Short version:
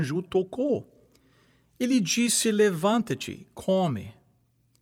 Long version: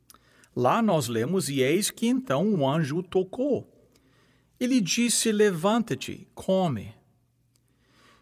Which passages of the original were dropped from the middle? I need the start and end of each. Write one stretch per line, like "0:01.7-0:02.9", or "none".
none